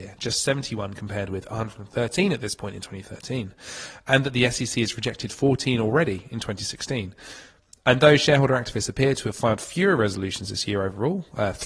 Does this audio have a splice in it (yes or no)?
no